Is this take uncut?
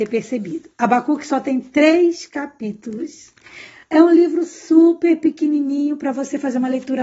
yes; 0 cuts

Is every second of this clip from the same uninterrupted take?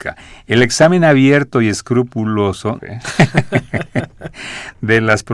no; 1 cut; at 2.8 s

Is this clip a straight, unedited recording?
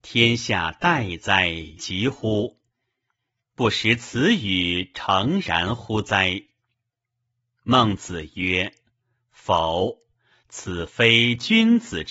no; 1 cut; at 1.8 s

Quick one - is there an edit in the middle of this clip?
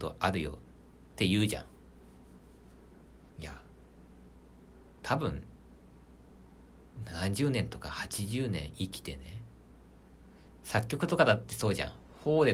yes; 1 cut; at 3.3 s

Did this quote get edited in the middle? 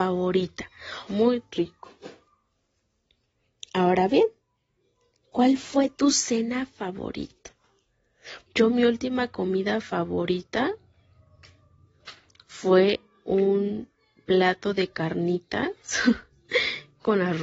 yes; 2 cuts; at 1.1 s, 8.5 s

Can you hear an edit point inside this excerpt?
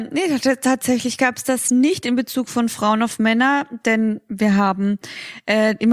no; 0 cuts

